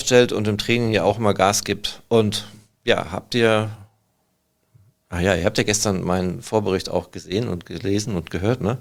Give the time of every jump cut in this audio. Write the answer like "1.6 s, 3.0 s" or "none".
none